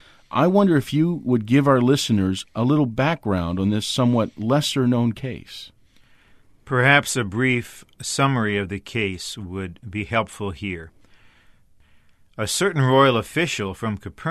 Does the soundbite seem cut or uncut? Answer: uncut